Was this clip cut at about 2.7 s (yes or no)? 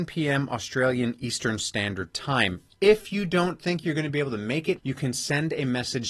no